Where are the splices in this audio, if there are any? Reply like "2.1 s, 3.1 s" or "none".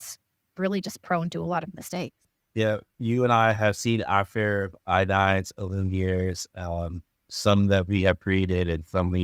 none